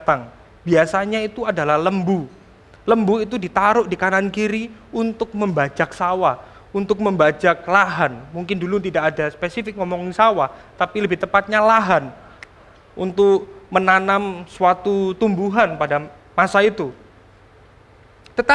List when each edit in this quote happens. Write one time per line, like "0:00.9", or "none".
none